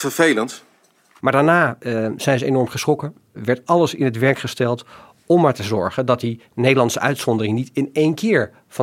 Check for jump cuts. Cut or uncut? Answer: cut